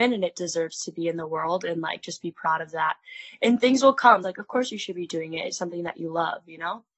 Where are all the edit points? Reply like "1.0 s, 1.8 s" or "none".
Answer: 4.2 s